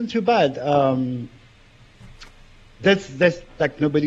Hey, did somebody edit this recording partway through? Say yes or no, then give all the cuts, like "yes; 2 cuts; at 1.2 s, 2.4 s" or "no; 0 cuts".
no; 0 cuts